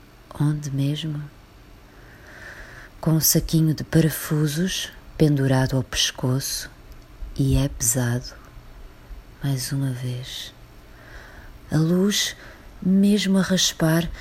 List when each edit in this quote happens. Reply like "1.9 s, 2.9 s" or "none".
9.4 s, 11.7 s